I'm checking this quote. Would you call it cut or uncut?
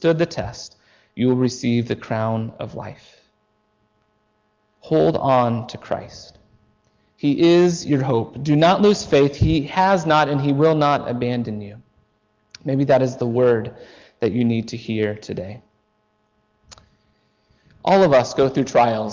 uncut